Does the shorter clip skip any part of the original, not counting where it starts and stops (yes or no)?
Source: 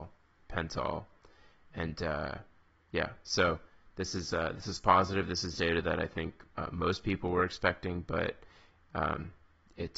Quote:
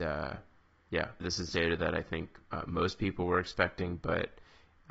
yes